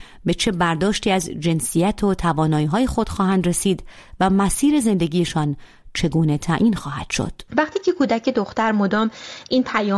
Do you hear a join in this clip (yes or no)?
yes